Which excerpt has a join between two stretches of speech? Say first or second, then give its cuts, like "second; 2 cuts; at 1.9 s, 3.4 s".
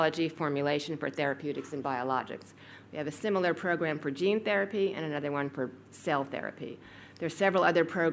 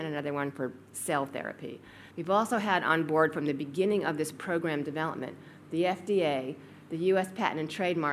second; 1 cut; at 2.1 s